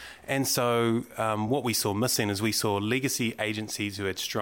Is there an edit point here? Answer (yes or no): no